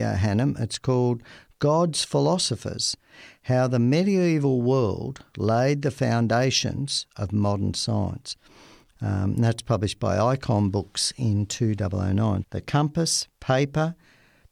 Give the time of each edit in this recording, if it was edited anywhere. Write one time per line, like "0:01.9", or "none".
0:08.9
0:12.4